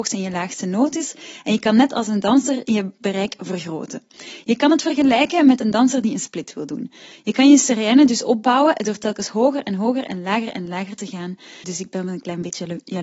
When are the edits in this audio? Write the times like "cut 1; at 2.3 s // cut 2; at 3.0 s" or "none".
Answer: cut 1; at 11.6 s